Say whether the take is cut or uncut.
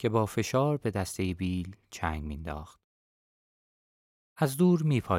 uncut